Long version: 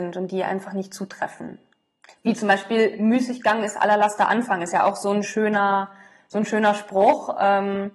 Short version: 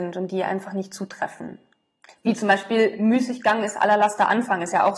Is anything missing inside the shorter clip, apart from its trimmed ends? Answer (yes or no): no